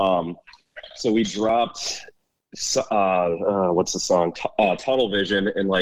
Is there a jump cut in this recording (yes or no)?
no